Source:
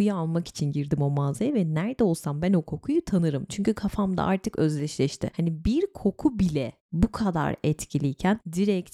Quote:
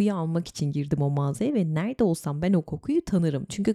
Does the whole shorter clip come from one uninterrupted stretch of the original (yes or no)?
yes